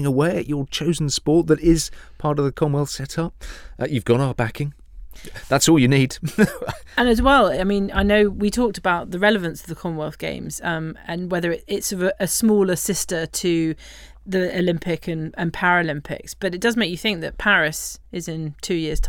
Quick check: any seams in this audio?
no; 0 cuts

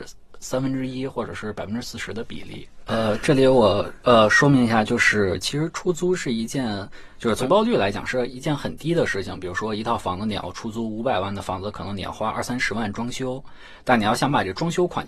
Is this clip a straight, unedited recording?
no; 1 cut; at 2.9 s

